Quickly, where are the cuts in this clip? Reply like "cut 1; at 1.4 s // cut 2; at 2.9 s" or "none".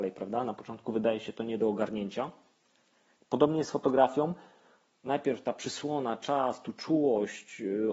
none